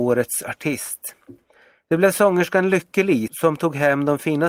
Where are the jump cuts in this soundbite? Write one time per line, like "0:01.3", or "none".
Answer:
0:03.3